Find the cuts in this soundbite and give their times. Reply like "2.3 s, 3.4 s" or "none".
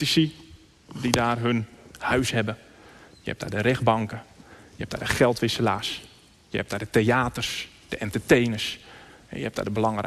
none

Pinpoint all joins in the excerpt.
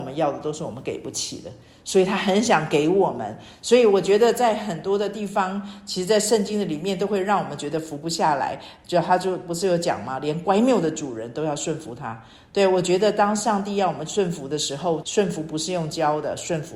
15.0 s

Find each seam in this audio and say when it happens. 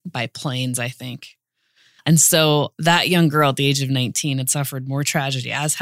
2.0 s

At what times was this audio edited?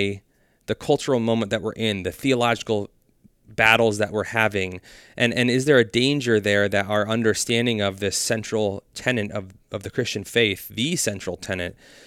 none

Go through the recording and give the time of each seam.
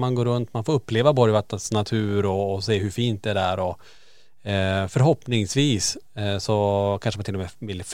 none

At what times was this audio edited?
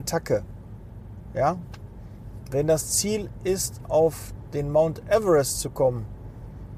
none

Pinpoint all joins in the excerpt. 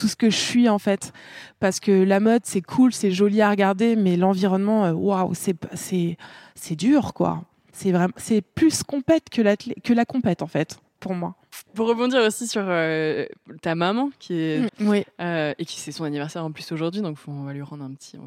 14.7 s

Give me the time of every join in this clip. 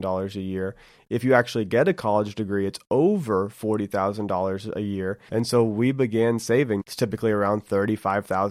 5.3 s, 6.8 s

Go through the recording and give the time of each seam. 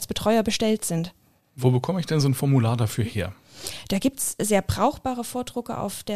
none

